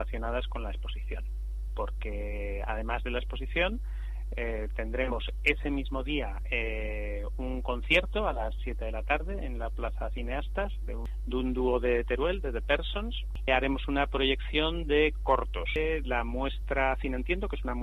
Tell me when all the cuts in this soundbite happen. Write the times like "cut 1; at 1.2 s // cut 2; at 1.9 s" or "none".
cut 1; at 13.5 s